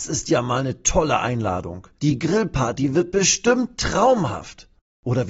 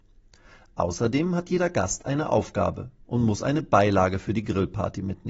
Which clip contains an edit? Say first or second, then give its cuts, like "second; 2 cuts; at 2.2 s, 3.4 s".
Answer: first; 1 cut; at 2.0 s